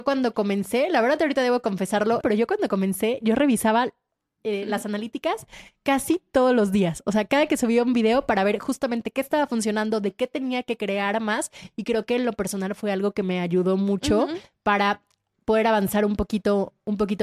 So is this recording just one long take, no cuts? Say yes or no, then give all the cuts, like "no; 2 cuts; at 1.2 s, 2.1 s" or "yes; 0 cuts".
no; 1 cut; at 2.2 s